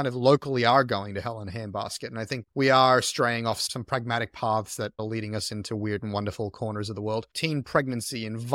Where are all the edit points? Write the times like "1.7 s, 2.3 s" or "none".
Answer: 7.3 s